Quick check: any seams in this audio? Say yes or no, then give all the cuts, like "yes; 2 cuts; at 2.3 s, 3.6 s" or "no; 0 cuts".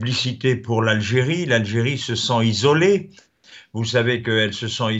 no; 0 cuts